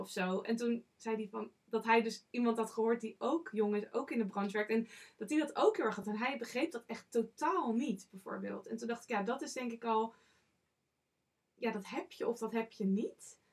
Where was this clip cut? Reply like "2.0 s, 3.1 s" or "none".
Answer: none